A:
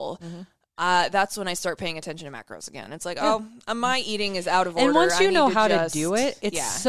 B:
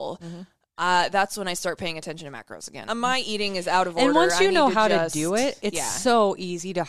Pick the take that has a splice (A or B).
B